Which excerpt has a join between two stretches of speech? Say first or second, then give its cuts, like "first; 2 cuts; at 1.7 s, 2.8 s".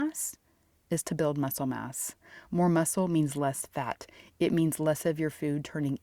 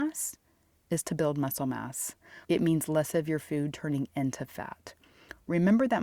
second; 1 cut; at 2.4 s